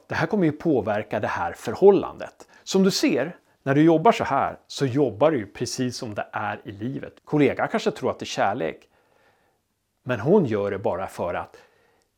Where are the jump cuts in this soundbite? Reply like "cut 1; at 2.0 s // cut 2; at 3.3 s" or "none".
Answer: cut 1; at 2.6 s // cut 2; at 7.2 s